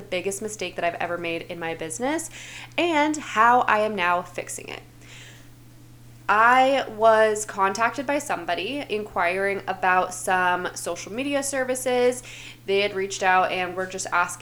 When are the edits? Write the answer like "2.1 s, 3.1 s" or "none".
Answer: 6.1 s